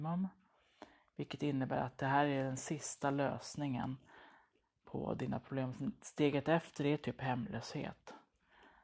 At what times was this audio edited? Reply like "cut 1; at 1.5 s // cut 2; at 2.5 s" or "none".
none